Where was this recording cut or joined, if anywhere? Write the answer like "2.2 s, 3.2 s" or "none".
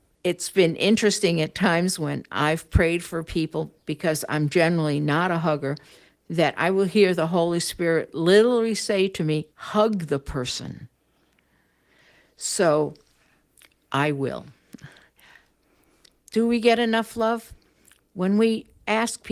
9.5 s